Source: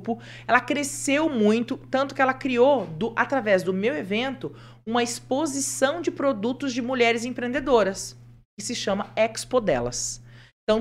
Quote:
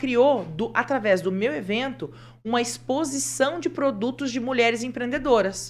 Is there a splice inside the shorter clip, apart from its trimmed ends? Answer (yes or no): no